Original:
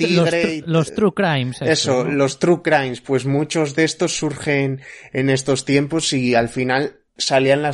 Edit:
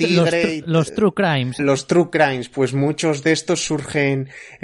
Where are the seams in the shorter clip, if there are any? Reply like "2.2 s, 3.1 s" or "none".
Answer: 1.6 s